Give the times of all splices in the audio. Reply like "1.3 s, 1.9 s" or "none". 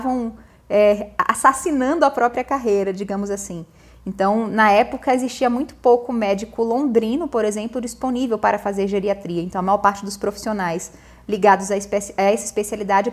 none